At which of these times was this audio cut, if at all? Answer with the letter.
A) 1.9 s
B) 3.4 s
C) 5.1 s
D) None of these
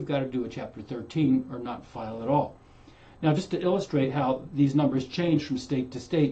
D